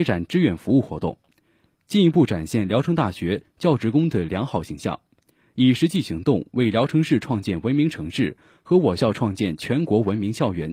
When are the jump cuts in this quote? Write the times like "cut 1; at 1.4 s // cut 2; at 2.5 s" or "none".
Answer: none